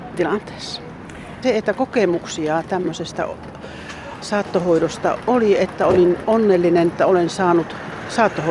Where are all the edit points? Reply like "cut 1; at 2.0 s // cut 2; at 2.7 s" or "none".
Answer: cut 1; at 1.4 s